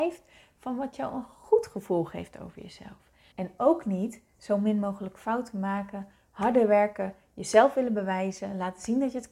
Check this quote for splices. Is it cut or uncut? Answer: cut